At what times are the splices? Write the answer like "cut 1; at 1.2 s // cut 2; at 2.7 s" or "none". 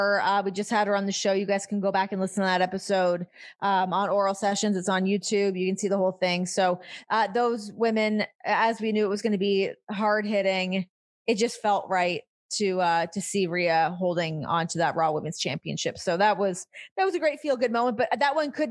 none